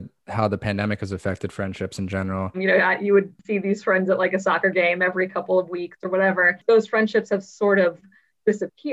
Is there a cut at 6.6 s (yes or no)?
no